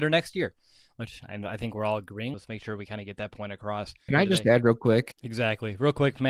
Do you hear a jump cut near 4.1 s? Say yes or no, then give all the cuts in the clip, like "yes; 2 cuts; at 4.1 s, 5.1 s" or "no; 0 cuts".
yes; 3 cuts; at 2.3 s, 4.1 s, 5.1 s